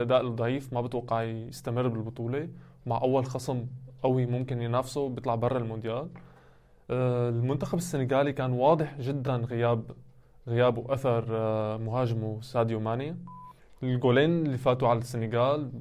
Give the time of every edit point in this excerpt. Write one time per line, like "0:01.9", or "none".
none